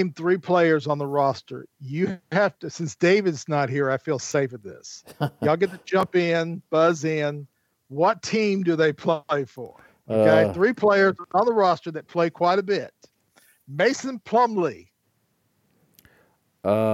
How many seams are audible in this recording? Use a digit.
0